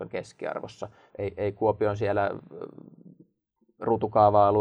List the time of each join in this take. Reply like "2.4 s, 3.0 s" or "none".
1.1 s